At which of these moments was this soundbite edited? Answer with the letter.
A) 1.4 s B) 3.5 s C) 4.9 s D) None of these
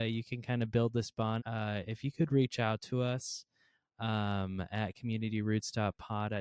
A